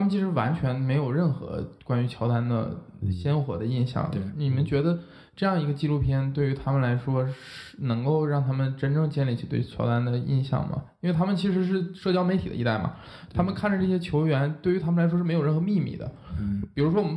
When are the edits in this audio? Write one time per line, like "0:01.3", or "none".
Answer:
none